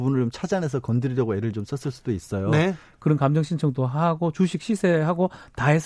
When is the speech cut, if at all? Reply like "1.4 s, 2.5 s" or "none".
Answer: 2.9 s